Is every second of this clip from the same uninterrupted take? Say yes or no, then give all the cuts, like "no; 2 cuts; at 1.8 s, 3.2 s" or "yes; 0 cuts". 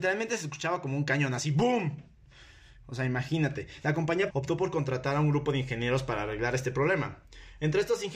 no; 1 cut; at 4.3 s